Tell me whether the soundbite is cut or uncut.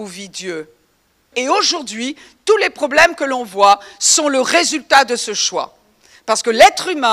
cut